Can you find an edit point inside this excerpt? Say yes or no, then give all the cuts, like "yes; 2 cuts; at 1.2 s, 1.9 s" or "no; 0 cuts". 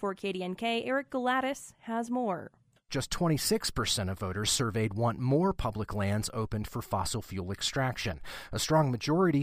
yes; 1 cut; at 2.9 s